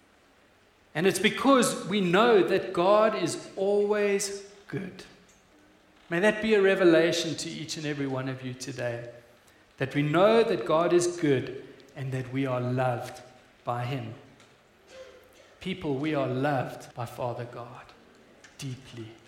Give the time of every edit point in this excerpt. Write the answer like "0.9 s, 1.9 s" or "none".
16.9 s